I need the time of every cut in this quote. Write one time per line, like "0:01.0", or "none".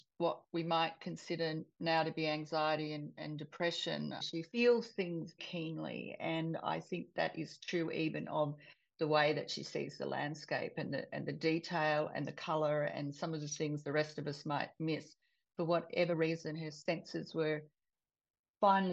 0:04.2
0:05.4

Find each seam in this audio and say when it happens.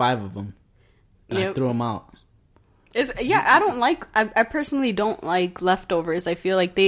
none

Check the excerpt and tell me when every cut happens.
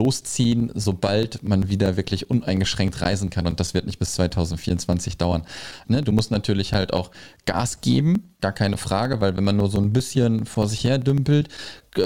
0:05.8
0:08.4

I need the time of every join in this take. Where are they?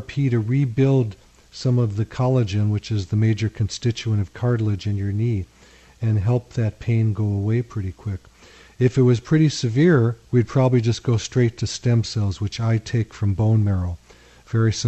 0:10.2

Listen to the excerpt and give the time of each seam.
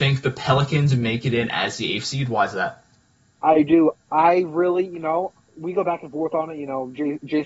none

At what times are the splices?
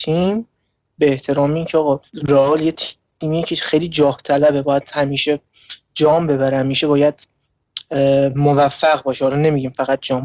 0:02.1

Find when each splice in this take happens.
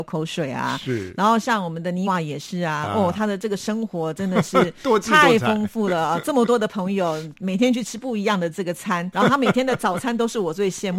0:02.1
0:09.1

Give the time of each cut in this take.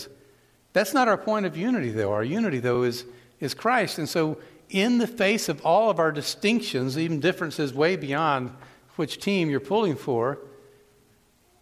none

